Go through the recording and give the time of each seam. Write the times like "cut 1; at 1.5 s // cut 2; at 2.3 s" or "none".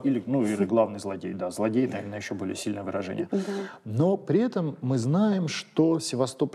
none